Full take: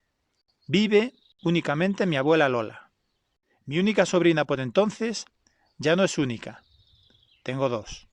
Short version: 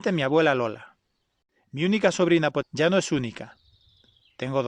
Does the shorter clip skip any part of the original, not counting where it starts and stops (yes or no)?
yes